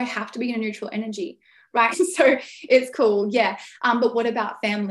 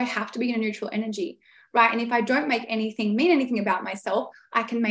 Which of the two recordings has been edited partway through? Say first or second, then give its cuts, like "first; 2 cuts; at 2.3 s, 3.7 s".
first; 1 cut; at 1.9 s